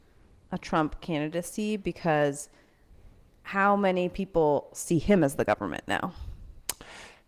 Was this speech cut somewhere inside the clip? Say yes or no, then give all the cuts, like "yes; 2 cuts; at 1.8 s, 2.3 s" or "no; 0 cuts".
no; 0 cuts